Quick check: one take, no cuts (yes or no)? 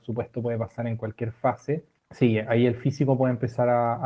no